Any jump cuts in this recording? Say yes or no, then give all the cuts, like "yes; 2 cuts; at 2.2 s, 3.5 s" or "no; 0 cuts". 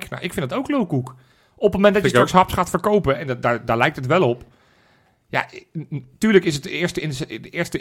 no; 0 cuts